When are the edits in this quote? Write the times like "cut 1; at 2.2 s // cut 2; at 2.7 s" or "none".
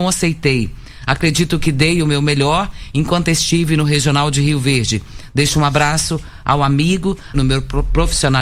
cut 1; at 7.3 s